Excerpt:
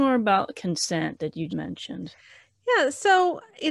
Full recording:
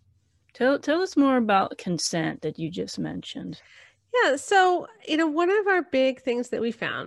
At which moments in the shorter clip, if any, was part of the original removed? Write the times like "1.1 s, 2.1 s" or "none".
1.5 s